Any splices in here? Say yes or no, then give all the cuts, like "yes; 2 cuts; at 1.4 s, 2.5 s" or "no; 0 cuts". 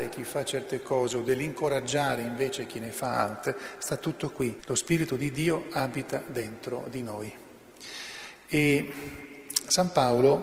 yes; 1 cut; at 4.6 s